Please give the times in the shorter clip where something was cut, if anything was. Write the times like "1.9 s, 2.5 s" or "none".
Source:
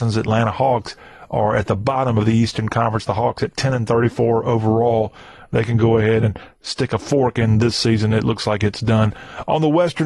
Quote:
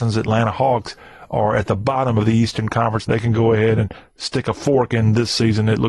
3.0 s